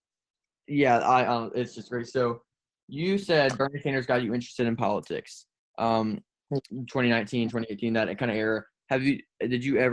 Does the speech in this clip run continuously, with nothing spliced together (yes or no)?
no